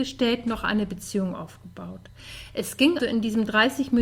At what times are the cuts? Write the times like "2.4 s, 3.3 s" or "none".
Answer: 3.0 s